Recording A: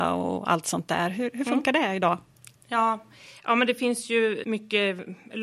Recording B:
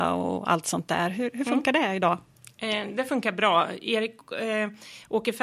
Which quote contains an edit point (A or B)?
A